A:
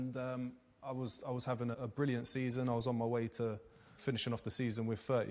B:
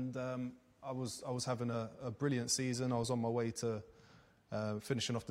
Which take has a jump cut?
A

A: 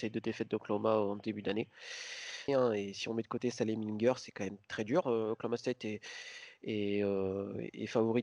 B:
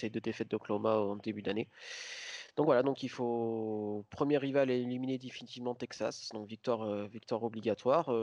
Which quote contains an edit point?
A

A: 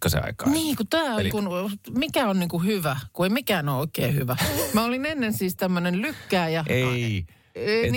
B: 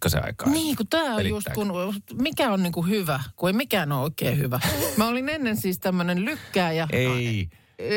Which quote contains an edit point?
A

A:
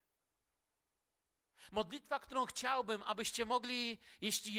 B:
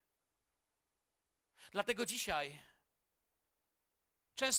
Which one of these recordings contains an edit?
A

